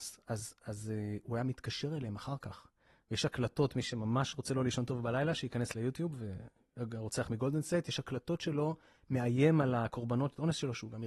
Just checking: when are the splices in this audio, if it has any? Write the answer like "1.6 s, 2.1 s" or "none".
none